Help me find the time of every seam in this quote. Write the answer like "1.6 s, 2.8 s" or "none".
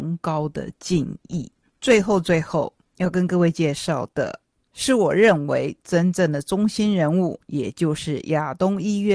none